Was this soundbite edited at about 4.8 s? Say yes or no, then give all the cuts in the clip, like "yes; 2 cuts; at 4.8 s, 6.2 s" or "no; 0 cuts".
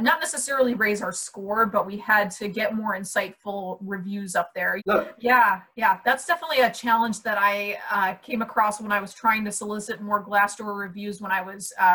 yes; 1 cut; at 4.8 s